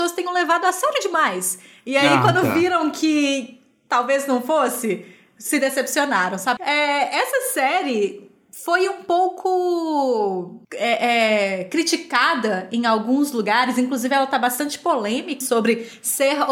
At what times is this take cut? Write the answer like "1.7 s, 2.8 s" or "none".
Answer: 6.6 s, 10.6 s, 15.4 s